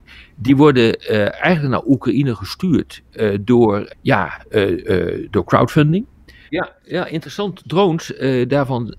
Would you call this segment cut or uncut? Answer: cut